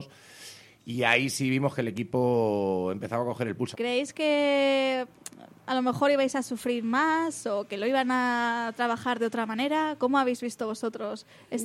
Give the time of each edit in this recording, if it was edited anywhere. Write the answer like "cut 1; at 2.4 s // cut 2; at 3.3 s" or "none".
cut 1; at 3.7 s